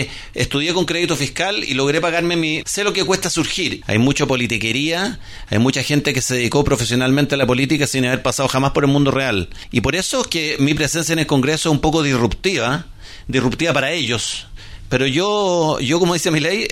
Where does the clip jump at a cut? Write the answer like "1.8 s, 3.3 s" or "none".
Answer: 2.6 s, 3.8 s